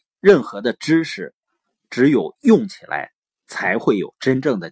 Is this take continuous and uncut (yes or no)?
yes